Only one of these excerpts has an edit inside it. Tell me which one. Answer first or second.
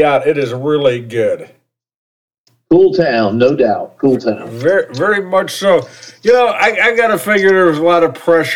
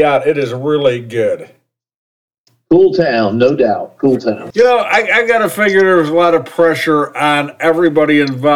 second